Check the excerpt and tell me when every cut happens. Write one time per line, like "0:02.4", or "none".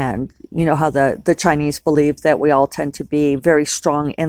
none